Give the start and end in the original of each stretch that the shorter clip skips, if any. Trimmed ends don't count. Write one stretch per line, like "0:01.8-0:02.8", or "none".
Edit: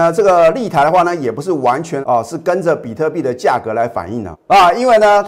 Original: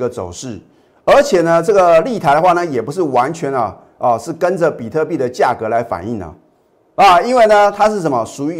0:03.5-0:04.0
0:06.3-0:06.8